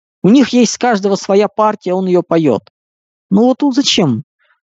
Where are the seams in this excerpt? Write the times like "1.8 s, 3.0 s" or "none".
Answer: none